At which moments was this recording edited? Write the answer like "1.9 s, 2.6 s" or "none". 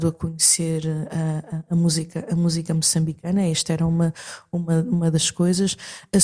none